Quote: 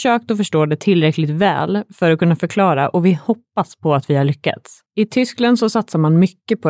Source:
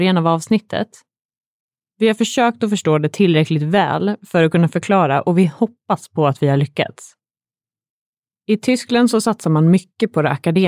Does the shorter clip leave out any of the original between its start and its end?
yes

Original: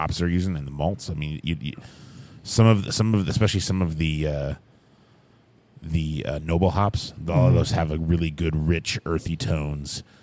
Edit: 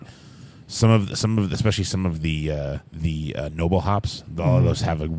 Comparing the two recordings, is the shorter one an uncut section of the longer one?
no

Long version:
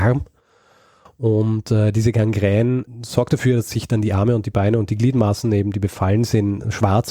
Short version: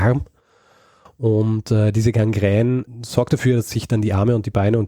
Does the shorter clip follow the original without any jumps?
yes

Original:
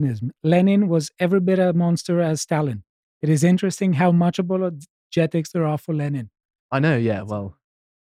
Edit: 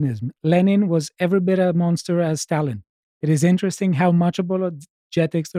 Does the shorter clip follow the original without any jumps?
yes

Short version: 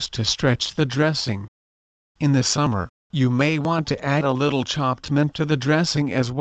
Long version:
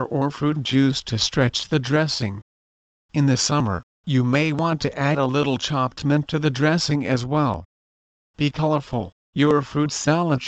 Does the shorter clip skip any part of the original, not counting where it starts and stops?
no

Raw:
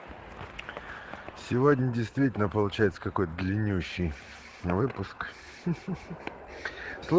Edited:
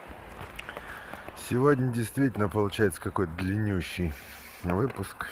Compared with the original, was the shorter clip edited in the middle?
no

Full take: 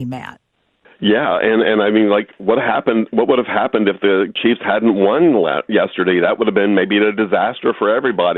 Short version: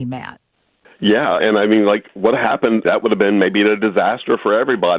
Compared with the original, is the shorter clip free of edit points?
no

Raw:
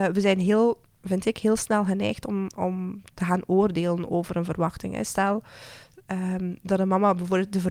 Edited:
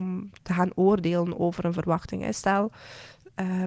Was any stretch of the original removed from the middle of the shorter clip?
no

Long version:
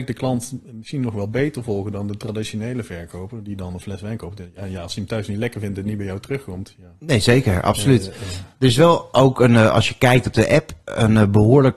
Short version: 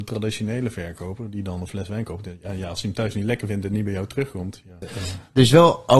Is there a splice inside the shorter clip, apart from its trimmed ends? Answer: yes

